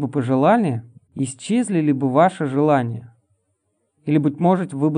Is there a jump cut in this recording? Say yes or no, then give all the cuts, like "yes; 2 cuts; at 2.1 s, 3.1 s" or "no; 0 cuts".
yes; 1 cut; at 1.1 s